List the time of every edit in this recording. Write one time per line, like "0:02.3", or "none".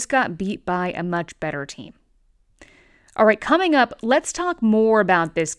none